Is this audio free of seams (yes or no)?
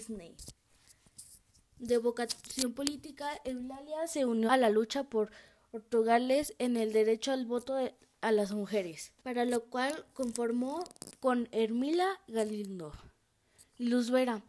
no